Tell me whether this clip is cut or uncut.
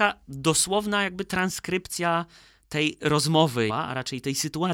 cut